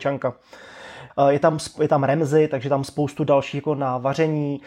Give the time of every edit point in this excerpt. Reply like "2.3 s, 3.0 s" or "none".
1.1 s